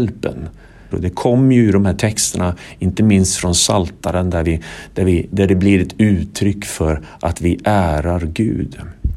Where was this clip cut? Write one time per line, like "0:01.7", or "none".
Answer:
0:00.9